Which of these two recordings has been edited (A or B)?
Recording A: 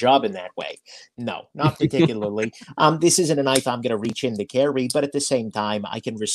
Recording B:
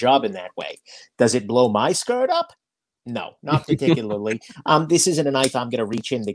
A